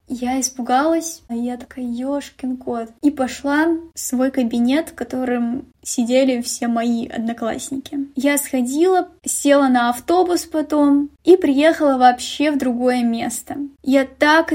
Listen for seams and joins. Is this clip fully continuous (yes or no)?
no